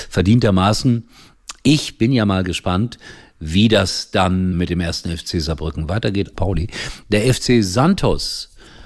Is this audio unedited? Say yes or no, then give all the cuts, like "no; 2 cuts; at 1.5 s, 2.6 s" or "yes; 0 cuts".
no; 2 cuts; at 4.5 s, 6.3 s